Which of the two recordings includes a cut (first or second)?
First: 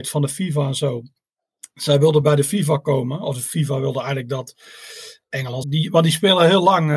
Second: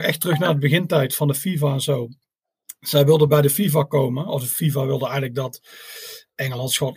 first